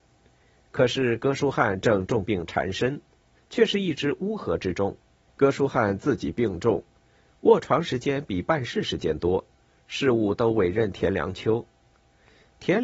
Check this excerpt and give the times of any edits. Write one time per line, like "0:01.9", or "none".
0:03.3
0:05.2